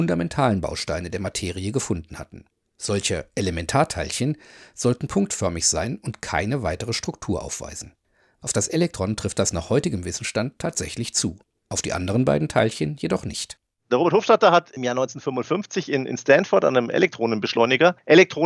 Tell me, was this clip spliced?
no; 0 cuts

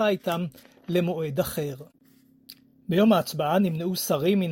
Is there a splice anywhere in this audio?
no; 0 cuts

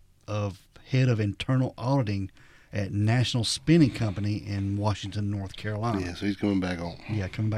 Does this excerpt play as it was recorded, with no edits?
yes; 0 cuts

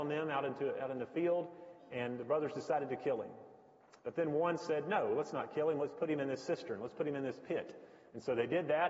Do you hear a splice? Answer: no; 0 cuts

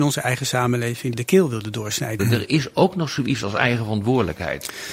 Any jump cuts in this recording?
yes; 2 cuts; at 1.1 s, 2.2 s

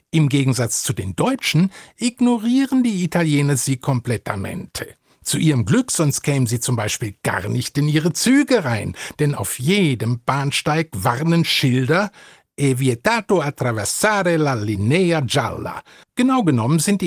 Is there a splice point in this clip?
yes; 1 cut; at 16.0 s

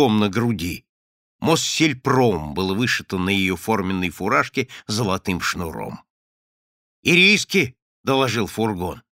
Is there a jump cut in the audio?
no; 0 cuts

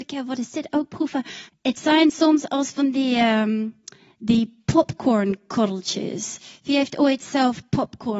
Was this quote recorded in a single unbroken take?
no; 1 cut; at 1.5 s

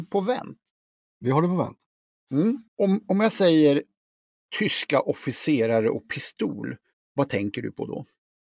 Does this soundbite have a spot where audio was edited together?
yes; 1 cut; at 2.7 s

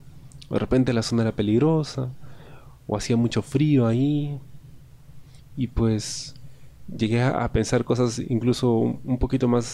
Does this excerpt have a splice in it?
no; 0 cuts

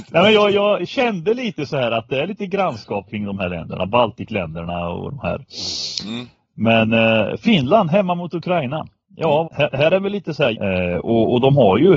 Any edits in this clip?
yes; 2 cuts; at 9.4 s, 10.5 s

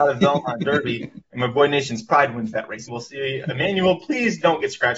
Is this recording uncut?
no; 2 cuts; at 1.2 s, 2.9 s

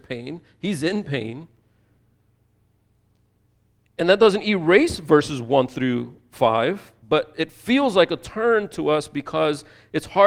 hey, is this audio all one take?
no; 1 cut; at 7.0 s

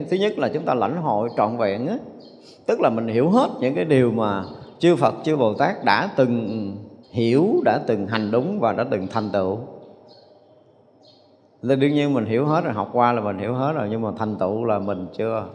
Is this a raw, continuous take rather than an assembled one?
no; 1 cut; at 7.0 s

